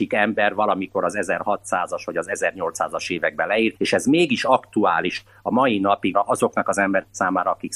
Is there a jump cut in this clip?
yes; 2 cuts; at 3.8 s, 6.1 s

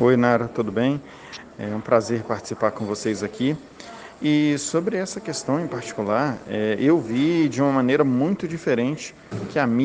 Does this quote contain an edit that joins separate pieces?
no; 0 cuts

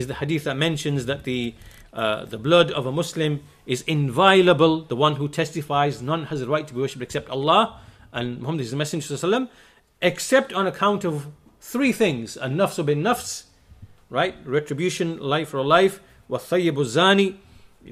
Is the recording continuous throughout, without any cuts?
yes; 0 cuts

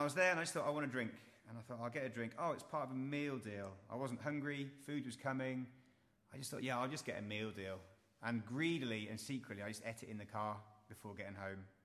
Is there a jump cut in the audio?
no; 0 cuts

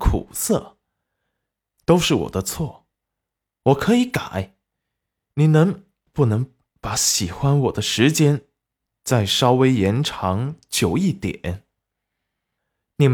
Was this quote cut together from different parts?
yes; 1 cut; at 1.8 s

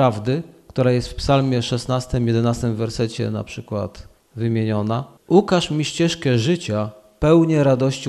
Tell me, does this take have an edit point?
no; 0 cuts

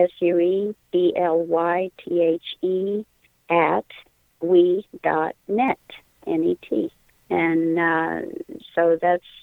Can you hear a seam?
no; 0 cuts

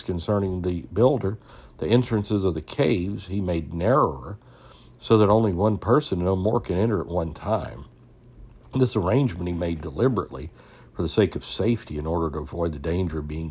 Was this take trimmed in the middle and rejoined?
no; 0 cuts

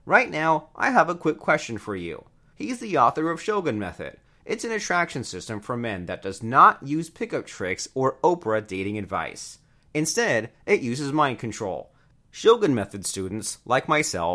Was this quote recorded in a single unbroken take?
no; 2 cuts; at 2.5 s, 12.1 s

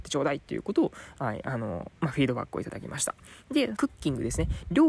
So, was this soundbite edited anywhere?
yes; 2 cuts; at 1.9 s, 3.8 s

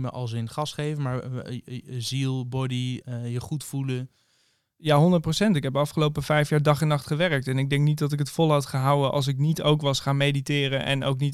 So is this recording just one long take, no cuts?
no; 1 cut; at 3.0 s

